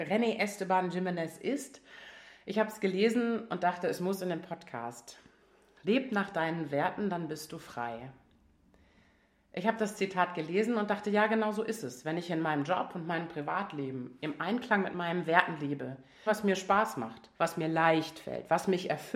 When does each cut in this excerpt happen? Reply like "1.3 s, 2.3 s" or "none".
16.3 s, 17.3 s